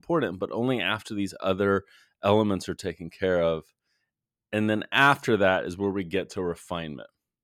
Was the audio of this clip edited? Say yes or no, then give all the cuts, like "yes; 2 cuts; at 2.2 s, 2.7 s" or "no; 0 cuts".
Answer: no; 0 cuts